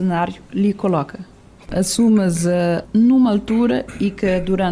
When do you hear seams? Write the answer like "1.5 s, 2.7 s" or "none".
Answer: 1.7 s, 2.8 s